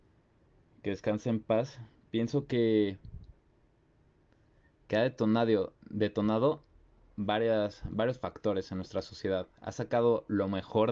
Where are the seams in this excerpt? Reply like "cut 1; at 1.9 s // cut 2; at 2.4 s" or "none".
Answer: none